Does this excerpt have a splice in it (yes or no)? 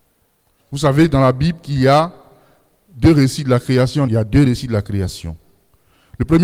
yes